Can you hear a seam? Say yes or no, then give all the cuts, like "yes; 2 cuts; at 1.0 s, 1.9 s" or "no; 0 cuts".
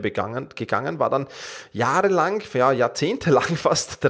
no; 0 cuts